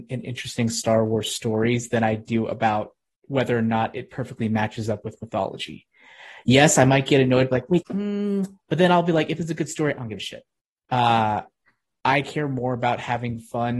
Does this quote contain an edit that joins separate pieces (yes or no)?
yes